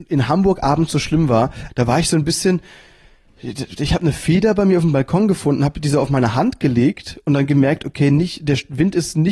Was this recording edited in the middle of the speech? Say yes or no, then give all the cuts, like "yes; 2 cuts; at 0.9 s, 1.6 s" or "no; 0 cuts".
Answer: yes; 1 cut; at 1.7 s